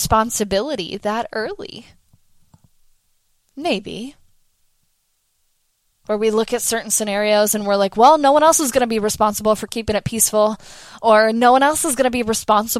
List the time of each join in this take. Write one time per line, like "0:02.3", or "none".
0:05.9